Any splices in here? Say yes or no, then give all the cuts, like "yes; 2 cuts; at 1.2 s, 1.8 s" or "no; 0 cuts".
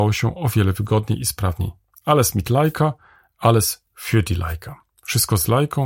yes; 1 cut; at 1.9 s